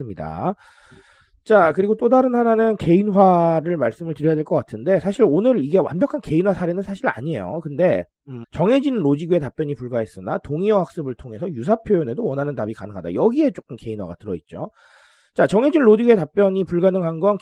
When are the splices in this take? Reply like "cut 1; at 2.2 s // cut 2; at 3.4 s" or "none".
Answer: cut 1; at 8.4 s

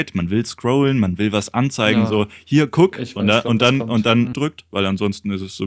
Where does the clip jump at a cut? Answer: cut 1; at 4.3 s

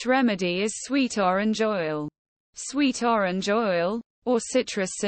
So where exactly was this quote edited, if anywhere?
none

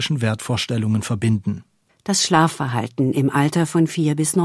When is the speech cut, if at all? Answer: cut 1; at 1.9 s

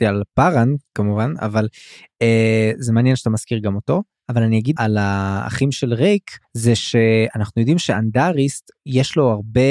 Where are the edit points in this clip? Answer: cut 1; at 4.8 s // cut 2; at 6.4 s

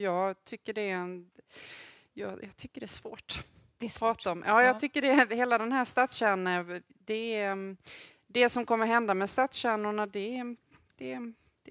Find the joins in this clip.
none

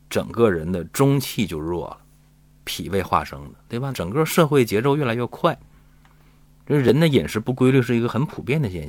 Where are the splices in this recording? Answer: cut 1; at 2.6 s // cut 2; at 3.9 s

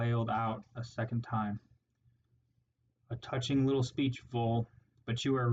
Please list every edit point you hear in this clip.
none

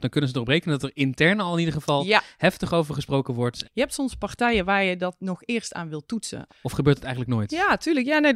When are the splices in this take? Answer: cut 1; at 3.6 s // cut 2; at 6.5 s

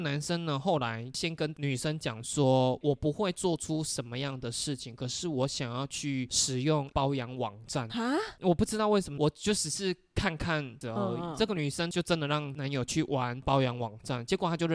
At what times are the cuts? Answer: cut 1; at 9.2 s // cut 2; at 10.8 s

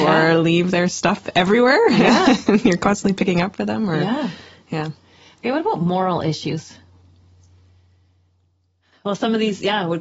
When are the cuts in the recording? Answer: none

